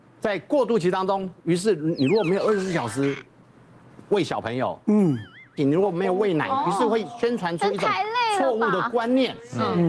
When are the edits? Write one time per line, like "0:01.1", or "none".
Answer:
0:05.6